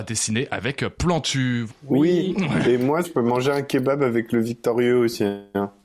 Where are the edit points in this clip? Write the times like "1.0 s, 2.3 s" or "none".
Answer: 1.7 s, 3.0 s

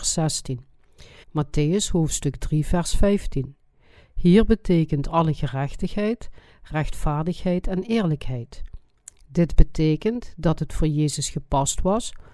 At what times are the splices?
1.2 s

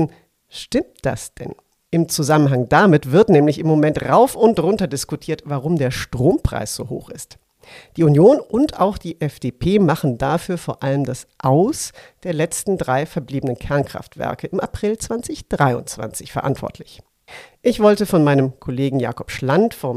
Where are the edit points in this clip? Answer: 1.8 s

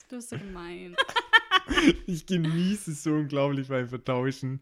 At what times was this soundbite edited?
0.9 s

